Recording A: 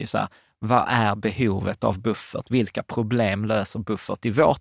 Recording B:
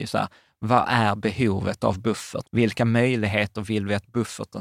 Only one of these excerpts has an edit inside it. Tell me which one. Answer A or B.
B